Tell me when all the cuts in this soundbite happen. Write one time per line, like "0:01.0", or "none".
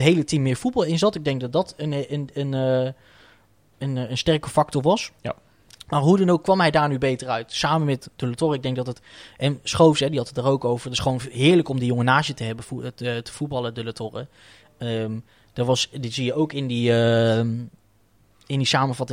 none